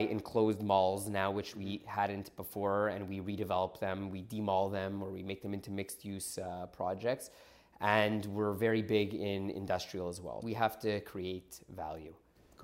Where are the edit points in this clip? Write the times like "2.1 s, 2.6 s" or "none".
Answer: 10.4 s